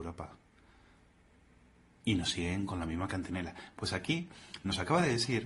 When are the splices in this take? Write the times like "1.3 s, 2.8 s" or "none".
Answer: 3.7 s